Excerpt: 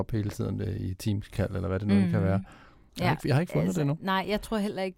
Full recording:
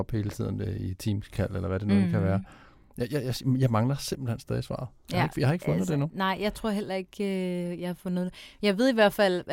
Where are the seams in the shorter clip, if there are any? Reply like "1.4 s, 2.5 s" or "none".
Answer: 2.9 s